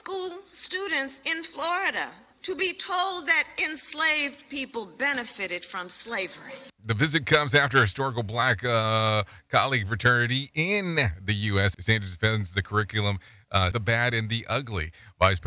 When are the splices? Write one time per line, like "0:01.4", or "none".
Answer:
0:11.7
0:13.7